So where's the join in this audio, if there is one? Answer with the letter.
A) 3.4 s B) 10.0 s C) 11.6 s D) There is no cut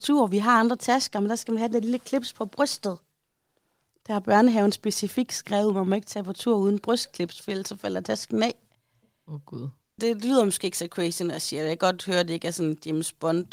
B